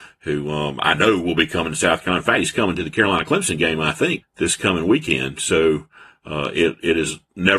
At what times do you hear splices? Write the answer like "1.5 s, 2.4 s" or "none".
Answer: 4.2 s